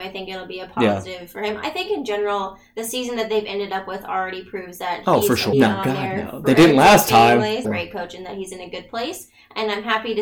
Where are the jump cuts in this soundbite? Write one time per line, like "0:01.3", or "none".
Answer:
0:05.5
0:07.6

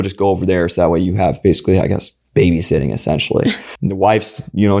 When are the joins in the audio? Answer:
0:03.8

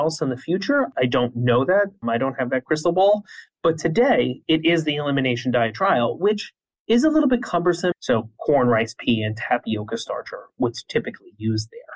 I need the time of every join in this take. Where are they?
0:07.9

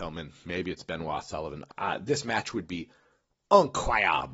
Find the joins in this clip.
0:01.7

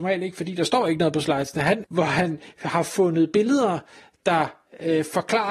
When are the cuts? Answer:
0:01.8

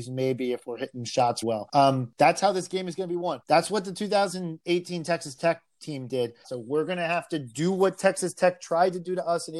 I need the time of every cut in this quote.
0:01.4
0:03.4
0:06.4

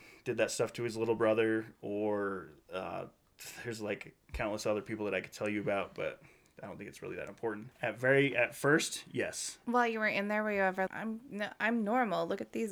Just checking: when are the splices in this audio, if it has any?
0:07.7
0:09.6
0:10.9

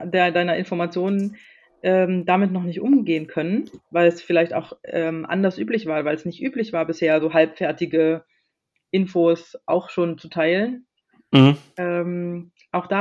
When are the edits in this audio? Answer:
none

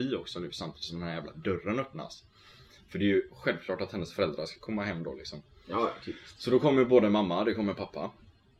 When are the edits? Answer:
none

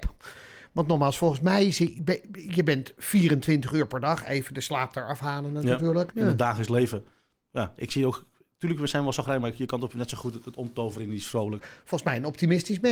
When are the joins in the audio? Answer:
0:06.1
0:11.6

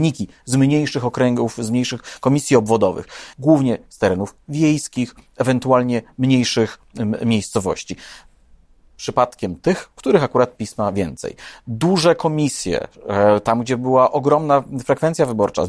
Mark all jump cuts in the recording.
0:03.3

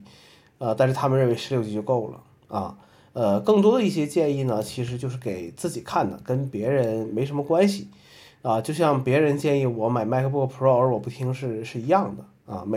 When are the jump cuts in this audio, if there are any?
none

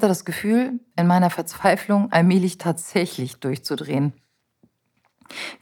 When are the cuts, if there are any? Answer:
none

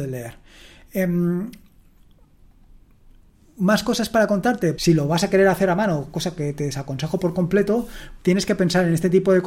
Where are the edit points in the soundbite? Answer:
0:04.8
0:08.2

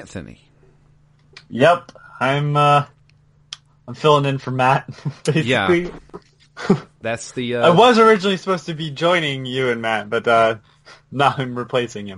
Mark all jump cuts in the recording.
none

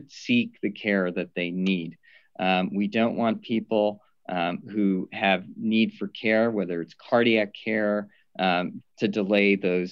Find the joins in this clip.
0:08.8

